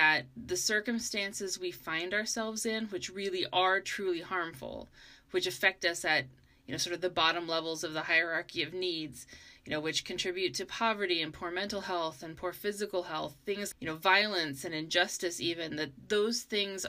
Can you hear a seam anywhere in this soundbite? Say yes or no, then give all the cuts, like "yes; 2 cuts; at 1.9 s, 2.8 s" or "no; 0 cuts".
yes; 1 cut; at 13.7 s